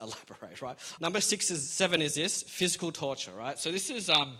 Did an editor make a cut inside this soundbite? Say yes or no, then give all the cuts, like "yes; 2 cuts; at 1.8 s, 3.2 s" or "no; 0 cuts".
yes; 1 cut; at 1.0 s